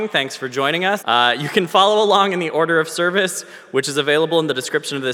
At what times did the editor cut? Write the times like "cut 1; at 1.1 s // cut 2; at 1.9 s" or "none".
cut 1; at 1.0 s

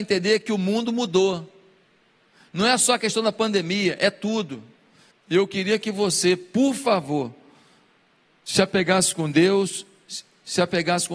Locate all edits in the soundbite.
cut 1; at 5.1 s

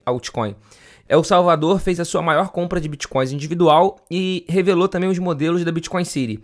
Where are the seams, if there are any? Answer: cut 1; at 1.1 s

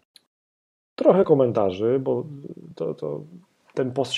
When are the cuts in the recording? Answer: none

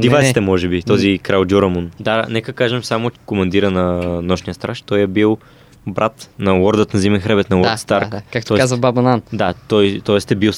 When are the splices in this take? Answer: cut 1; at 2.0 s // cut 2; at 3.1 s

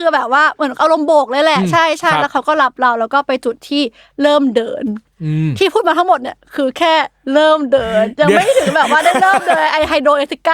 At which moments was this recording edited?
none

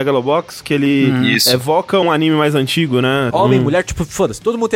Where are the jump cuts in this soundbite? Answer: cut 1; at 2.0 s // cut 2; at 3.3 s

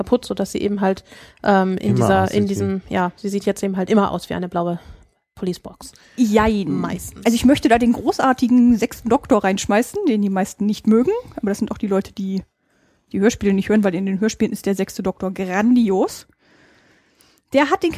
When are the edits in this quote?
none

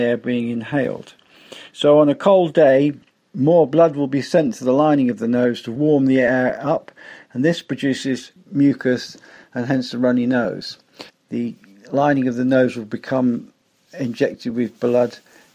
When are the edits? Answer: cut 1; at 11.1 s

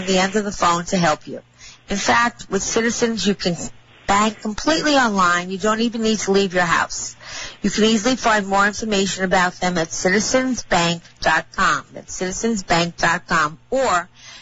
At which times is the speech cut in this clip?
none

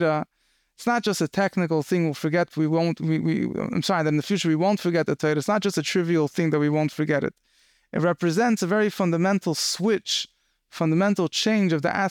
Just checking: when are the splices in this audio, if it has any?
none

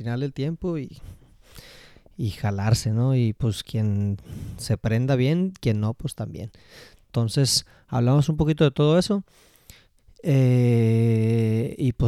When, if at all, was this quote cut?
none

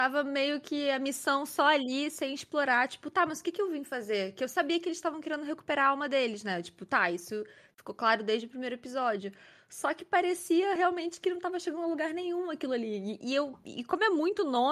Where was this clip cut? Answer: none

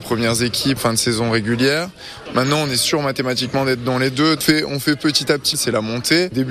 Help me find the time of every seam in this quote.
cut 1; at 2.2 s // cut 2; at 4.4 s // cut 3; at 5.5 s

